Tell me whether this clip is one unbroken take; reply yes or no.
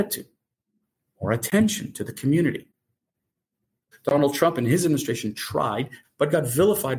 no